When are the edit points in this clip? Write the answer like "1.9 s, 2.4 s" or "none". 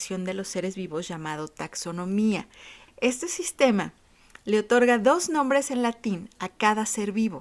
2.9 s